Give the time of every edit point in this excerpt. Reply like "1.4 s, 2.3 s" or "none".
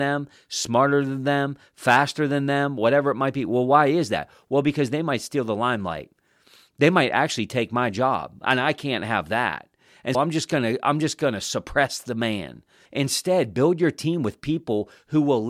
10.1 s, 12.9 s

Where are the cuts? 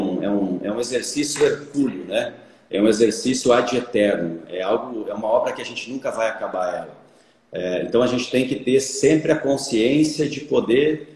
none

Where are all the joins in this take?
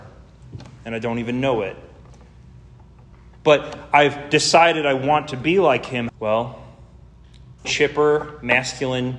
6.1 s, 7.6 s

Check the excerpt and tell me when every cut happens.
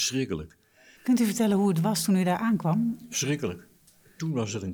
1.0 s

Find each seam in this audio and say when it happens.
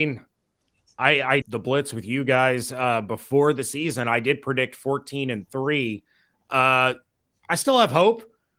1.4 s

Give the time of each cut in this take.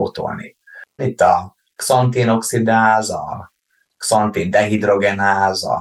1.0 s

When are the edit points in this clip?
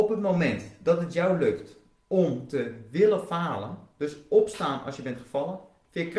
3.9 s

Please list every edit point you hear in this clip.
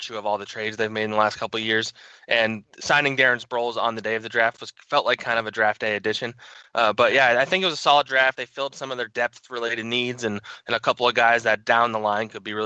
none

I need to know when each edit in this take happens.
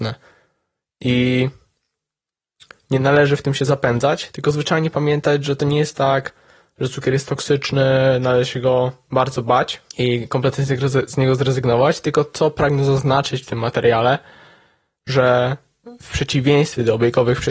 9.9 s

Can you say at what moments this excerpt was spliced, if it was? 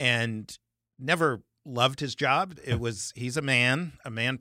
2.6 s

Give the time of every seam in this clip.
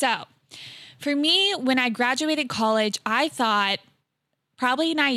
none

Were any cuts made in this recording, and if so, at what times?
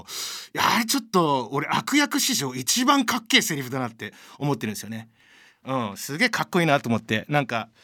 5.6 s

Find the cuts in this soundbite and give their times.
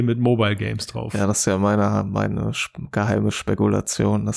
none

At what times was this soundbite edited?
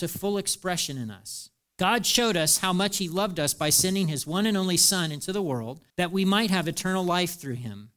1.6 s, 5.9 s

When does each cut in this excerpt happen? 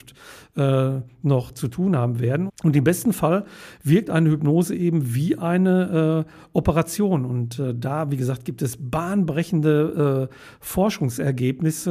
2.5 s

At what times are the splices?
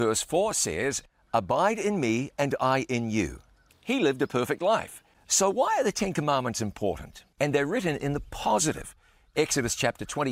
3.7 s, 5.1 s, 7.3 s

